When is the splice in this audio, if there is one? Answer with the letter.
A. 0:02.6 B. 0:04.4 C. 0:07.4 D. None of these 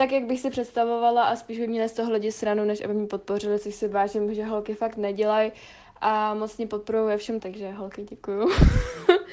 C